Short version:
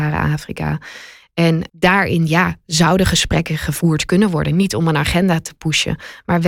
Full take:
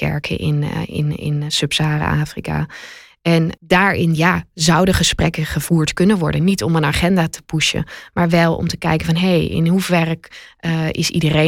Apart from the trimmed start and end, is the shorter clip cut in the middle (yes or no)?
no